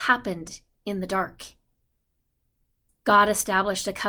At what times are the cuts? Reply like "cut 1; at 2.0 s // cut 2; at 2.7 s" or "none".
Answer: cut 1; at 2.9 s

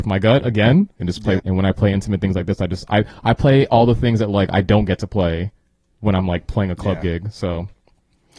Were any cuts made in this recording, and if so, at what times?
cut 1; at 1.4 s

